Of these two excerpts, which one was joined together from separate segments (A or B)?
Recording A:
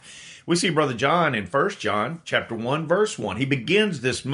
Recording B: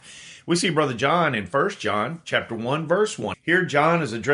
B